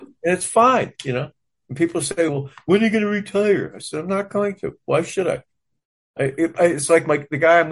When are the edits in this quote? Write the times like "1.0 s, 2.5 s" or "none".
none

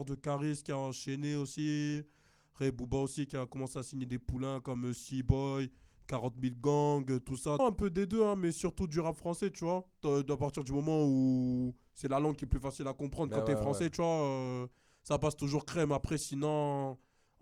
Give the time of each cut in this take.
7.6 s

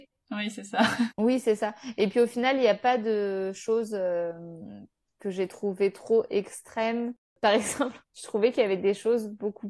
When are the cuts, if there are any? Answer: 1.1 s, 8.0 s

